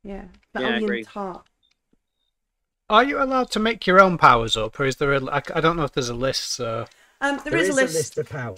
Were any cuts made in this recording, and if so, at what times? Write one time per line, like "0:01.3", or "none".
none